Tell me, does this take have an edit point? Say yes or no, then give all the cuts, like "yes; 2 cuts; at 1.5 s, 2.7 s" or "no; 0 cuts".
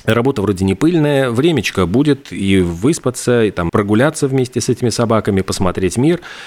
yes; 1 cut; at 3.7 s